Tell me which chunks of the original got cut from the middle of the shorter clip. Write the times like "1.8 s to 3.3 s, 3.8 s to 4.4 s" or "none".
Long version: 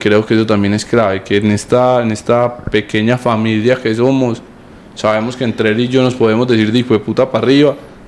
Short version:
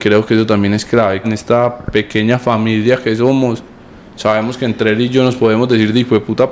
1.2 s to 2.0 s